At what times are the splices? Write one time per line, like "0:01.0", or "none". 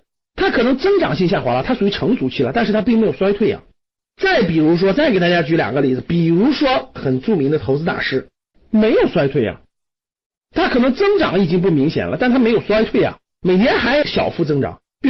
0:04.0
0:08.5